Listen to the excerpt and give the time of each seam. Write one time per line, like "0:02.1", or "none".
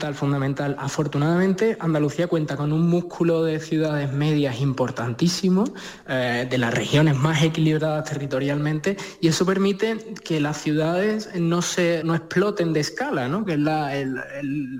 0:12.0
0:13.5